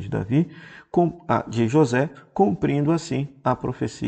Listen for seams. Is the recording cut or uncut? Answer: uncut